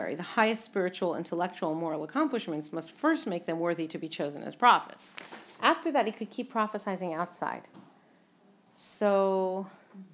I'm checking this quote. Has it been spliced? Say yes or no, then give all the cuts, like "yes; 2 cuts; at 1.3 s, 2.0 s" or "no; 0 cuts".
yes; 1 cut; at 5.6 s